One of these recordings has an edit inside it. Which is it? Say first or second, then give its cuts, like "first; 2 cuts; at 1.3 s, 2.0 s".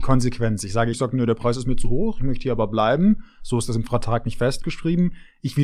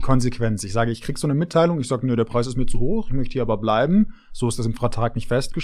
first; 1 cut; at 0.9 s